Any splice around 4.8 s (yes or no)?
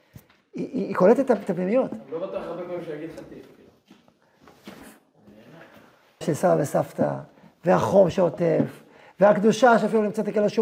yes